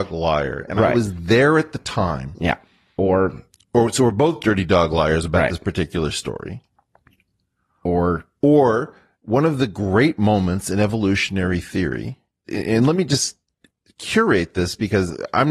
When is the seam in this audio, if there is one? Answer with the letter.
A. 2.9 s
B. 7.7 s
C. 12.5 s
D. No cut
C